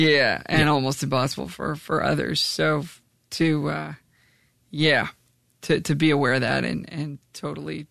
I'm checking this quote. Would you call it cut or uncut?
uncut